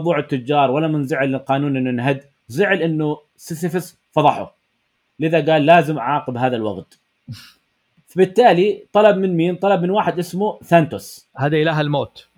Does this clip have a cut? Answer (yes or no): no